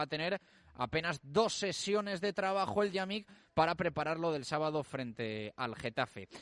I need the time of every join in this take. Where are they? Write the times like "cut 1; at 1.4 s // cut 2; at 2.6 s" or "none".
none